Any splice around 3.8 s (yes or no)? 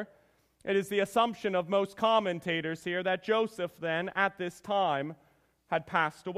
no